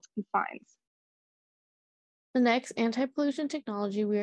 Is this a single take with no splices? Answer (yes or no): yes